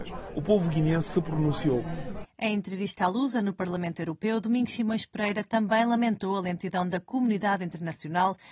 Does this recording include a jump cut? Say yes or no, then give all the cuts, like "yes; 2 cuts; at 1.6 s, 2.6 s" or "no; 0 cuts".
yes; 1 cut; at 2.2 s